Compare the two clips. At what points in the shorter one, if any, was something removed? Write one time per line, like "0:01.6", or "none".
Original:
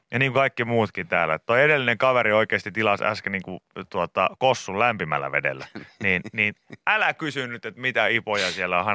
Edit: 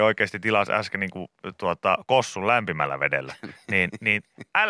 none